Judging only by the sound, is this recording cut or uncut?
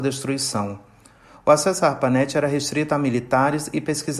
uncut